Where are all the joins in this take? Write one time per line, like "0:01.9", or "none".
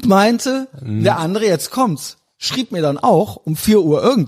none